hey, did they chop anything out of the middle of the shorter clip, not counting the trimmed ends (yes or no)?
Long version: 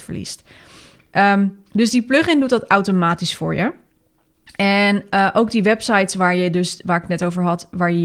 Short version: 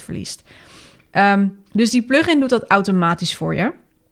no